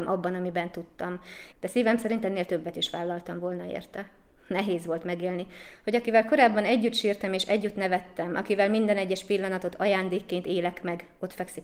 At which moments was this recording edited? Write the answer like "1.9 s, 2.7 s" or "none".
1.5 s